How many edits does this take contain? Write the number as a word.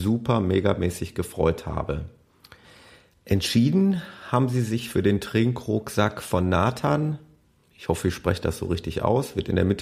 zero